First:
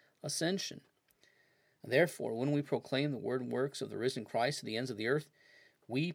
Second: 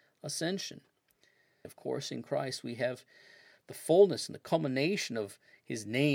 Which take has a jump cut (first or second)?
second